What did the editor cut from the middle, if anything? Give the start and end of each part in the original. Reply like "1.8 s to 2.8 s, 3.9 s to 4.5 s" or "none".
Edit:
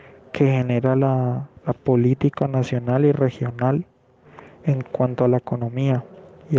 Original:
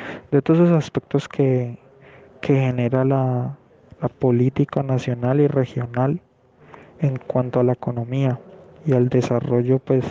3.6 s to 3.9 s

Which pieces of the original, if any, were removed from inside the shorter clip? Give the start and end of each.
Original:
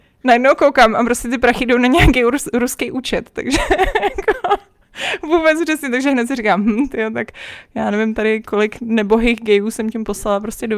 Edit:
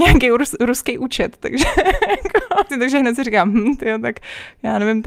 4.6 s to 5.8 s

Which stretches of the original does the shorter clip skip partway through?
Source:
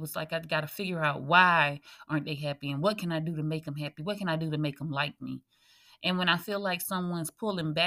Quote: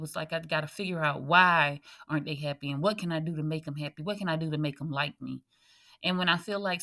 none

